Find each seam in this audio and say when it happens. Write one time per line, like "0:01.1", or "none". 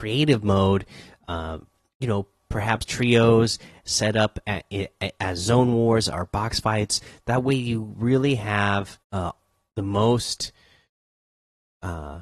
0:02.8
0:09.0

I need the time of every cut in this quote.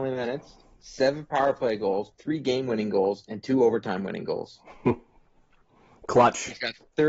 0:02.1

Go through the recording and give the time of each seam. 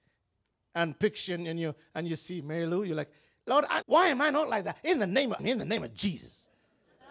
0:03.8
0:05.4

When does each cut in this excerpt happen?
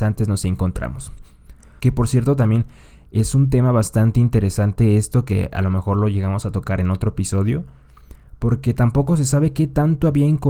0:01.8

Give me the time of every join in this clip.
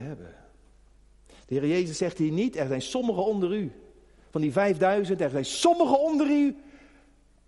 none

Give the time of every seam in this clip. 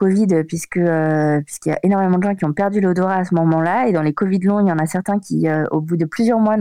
none

